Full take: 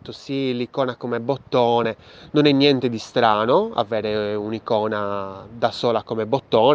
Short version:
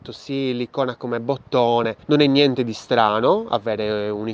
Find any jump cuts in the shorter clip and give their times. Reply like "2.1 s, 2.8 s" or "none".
2.0 s